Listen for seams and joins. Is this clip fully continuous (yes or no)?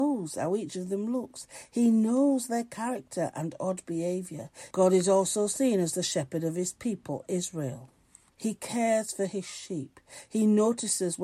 no